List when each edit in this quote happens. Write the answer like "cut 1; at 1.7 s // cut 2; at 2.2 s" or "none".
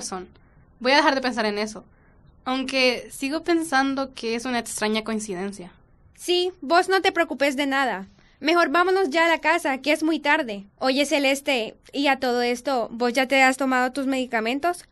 cut 1; at 10.7 s

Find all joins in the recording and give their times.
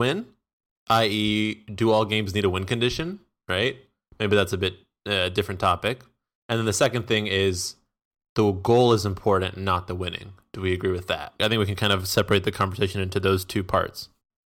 none

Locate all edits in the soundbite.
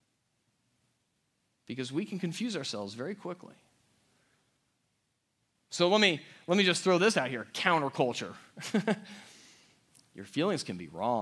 none

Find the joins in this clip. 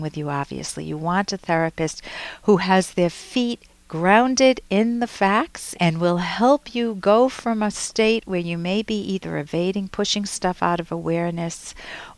cut 1; at 5.7 s

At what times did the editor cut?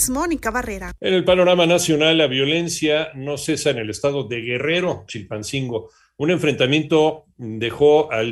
cut 1; at 5.1 s

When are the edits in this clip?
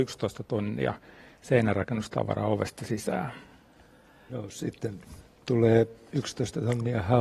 cut 1; at 4.3 s

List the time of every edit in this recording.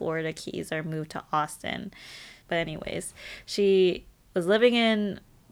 cut 1; at 2.4 s

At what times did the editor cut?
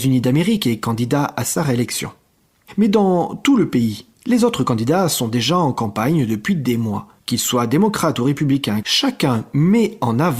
cut 1; at 7.2 s // cut 2; at 8.8 s

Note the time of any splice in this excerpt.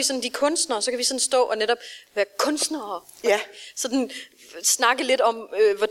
none

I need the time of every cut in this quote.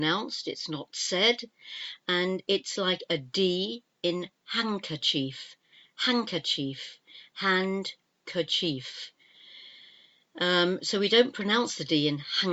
none

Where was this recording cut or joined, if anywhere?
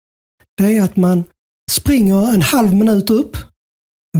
cut 1; at 1.7 s

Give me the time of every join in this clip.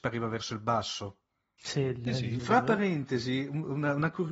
cut 1; at 2.4 s

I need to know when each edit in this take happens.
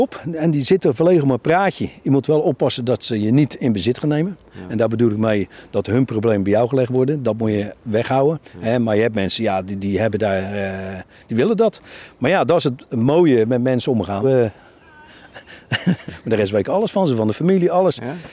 cut 1; at 14.2 s // cut 2; at 16.1 s

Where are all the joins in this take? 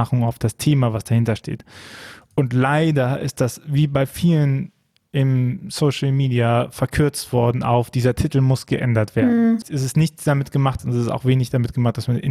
cut 1; at 9.6 s // cut 2; at 10.8 s

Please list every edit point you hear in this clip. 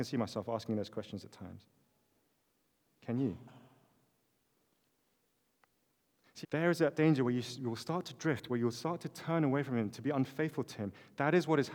cut 1; at 6.4 s

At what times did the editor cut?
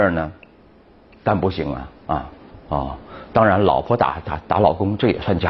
cut 1; at 2.5 s

